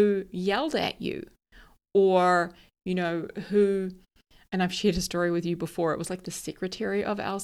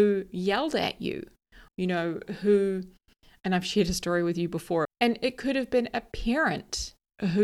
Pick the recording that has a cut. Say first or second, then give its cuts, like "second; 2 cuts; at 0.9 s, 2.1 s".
second; 2 cuts; at 1.7 s, 4.9 s